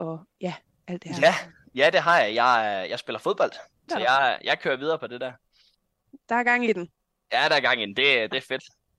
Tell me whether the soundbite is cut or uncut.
cut